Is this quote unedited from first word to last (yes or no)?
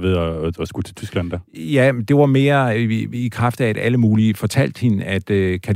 yes